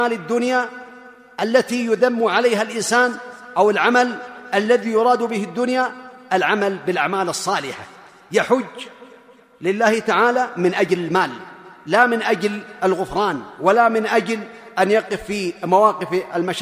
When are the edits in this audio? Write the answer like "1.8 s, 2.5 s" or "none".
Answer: none